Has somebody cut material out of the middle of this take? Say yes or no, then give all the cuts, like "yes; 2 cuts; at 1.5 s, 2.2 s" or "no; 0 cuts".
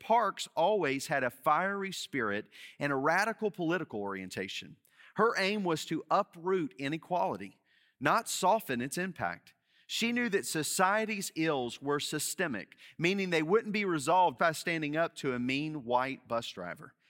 yes; 1 cut; at 14.4 s